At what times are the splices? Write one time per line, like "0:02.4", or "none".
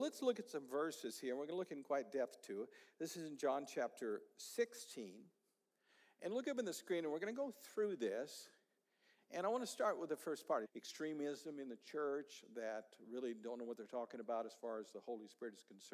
0:10.6